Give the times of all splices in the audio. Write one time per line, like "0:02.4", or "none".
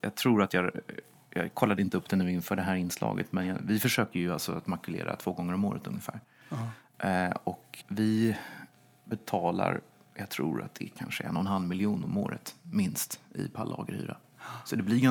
0:07.8